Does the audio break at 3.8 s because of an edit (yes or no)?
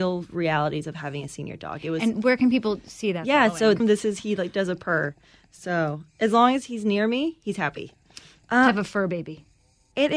yes